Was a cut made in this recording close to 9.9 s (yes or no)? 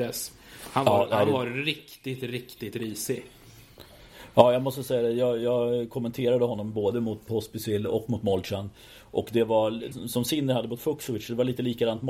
yes